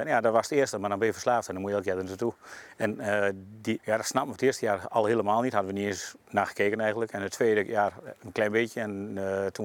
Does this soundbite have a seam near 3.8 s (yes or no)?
yes